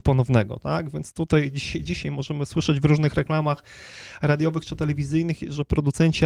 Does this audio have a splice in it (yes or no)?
no